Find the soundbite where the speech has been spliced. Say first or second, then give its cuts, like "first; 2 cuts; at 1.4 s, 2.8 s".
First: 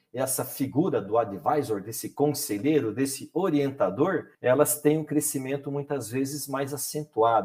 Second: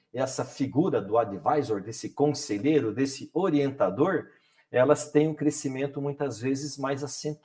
first; 1 cut; at 4.3 s